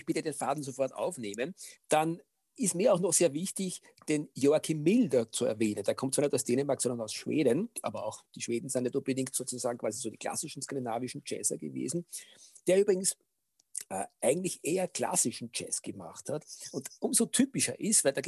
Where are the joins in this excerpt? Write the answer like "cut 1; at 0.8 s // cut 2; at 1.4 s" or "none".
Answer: cut 1; at 1.8 s